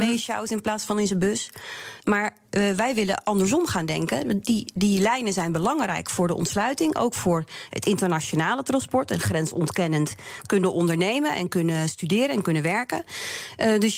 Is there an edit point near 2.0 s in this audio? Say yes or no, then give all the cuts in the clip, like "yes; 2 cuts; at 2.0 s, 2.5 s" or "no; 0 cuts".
yes; 1 cut; at 2.0 s